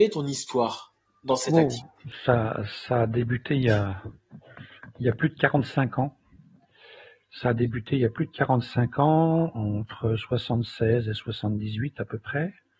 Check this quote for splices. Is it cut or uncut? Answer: uncut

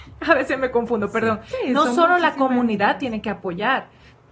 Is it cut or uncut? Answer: uncut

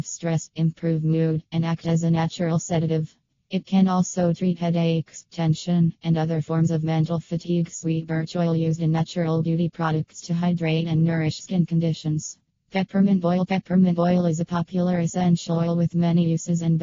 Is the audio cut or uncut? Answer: uncut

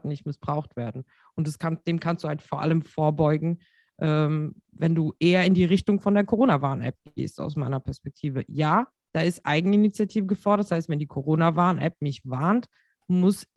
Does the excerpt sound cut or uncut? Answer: uncut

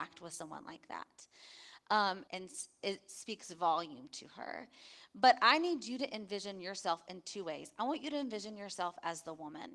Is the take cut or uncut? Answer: cut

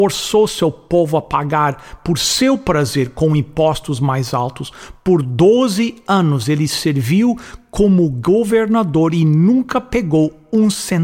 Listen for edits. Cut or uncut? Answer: uncut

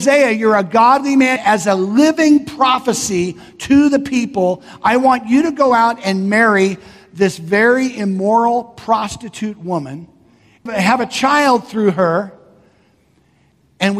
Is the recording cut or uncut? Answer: cut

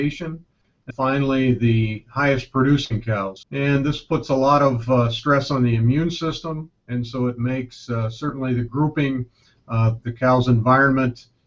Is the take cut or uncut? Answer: cut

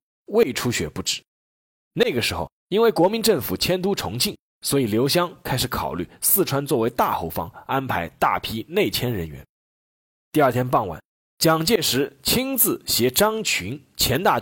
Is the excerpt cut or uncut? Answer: cut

